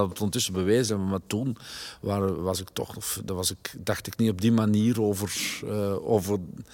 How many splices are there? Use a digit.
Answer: 0